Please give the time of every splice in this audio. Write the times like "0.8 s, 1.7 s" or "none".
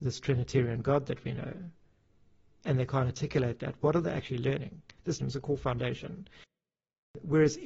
5.2 s